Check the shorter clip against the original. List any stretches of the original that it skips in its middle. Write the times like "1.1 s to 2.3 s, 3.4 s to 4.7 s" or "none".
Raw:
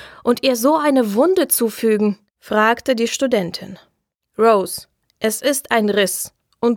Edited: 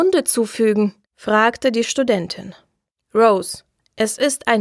none